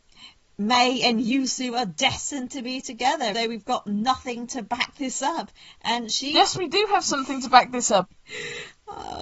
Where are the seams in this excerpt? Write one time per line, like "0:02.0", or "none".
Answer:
0:03.3
0:08.0